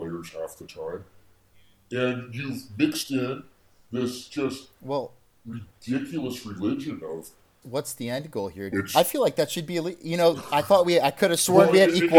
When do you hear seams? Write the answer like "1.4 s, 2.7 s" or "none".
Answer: 7.6 s, 8.7 s